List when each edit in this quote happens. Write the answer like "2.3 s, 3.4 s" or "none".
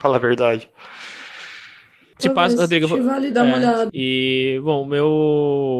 2.2 s, 3.9 s